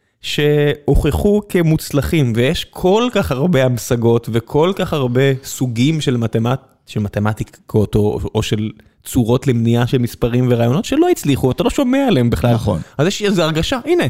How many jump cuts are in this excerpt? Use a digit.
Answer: 0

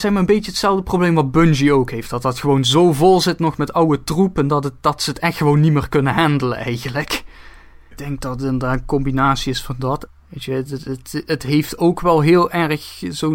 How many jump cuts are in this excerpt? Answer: 2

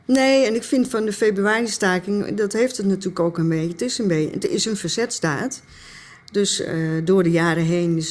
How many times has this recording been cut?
0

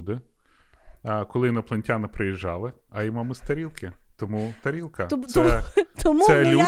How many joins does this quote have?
1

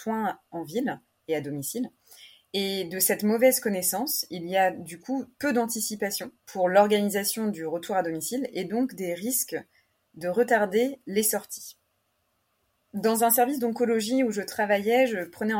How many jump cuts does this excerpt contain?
1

